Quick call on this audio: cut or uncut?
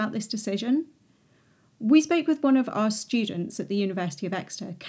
uncut